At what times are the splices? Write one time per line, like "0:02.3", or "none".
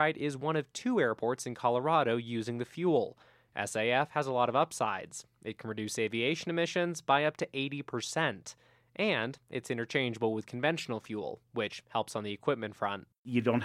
none